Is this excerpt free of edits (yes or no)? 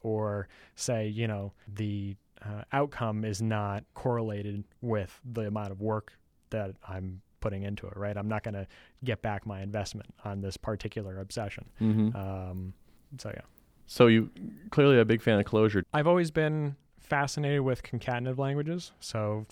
no